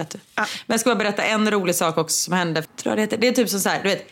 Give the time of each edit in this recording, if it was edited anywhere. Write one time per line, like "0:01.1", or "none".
0:02.6